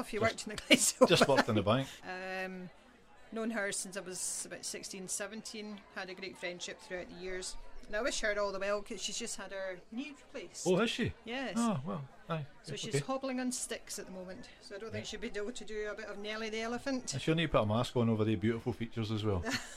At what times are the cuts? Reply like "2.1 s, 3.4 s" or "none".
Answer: 2.0 s